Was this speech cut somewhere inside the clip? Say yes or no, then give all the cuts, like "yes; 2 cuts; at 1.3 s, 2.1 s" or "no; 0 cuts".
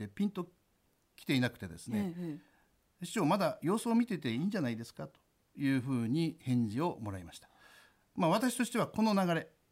no; 0 cuts